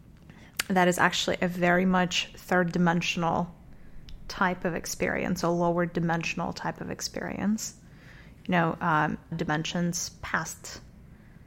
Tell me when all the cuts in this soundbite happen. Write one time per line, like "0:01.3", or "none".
0:09.3